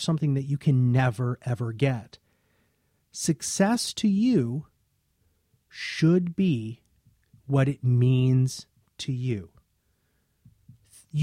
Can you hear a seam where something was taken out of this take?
no; 0 cuts

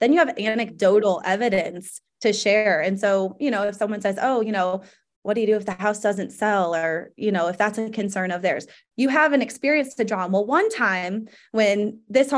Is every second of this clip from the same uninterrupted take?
yes; 0 cuts

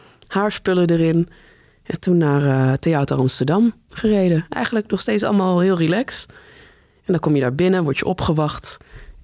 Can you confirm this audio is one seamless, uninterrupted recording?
yes; 0 cuts

